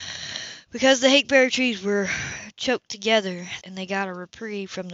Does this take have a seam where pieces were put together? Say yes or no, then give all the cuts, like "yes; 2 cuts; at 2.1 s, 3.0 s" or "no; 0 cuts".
yes; 1 cut; at 3.6 s